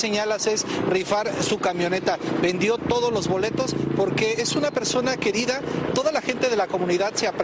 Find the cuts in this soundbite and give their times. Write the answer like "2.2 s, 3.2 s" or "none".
5.9 s